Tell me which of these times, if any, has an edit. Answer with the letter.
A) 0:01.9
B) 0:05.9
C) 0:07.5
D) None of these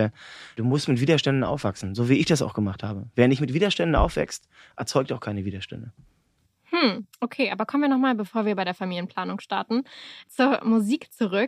D